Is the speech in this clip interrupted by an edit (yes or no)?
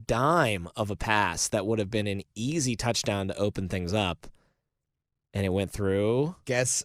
no